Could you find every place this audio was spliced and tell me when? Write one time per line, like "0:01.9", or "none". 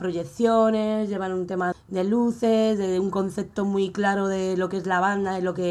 0:01.7